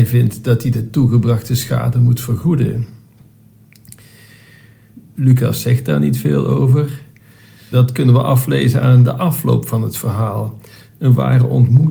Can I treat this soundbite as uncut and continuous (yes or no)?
no